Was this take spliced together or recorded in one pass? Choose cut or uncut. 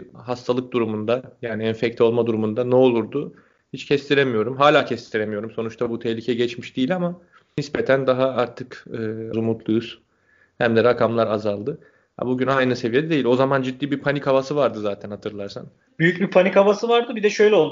cut